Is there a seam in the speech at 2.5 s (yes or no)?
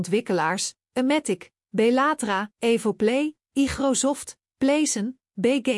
yes